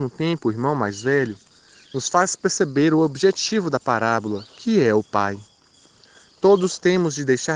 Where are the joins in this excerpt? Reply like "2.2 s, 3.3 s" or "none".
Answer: none